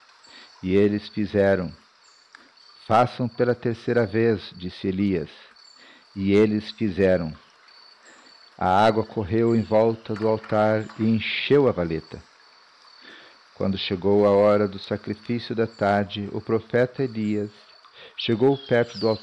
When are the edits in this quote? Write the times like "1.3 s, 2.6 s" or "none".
none